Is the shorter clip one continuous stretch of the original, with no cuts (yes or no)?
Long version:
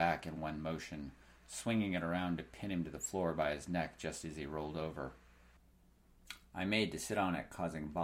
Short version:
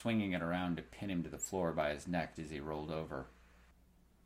no